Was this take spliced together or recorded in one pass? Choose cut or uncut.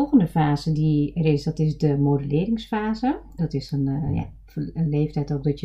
cut